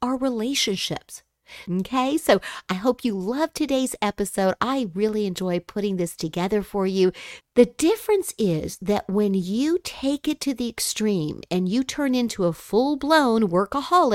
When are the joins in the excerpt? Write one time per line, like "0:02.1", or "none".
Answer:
0:01.6
0:07.4